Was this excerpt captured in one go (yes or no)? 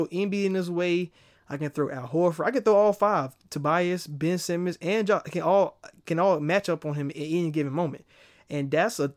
yes